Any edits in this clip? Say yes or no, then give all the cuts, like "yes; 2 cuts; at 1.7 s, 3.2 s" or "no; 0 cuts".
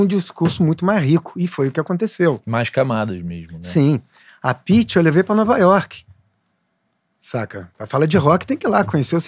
no; 0 cuts